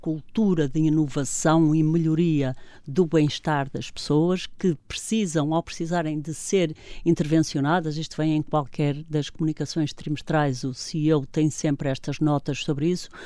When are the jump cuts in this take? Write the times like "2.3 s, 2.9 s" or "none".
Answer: none